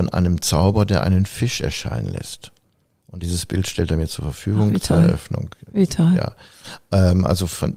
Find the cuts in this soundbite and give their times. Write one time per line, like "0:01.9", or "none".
none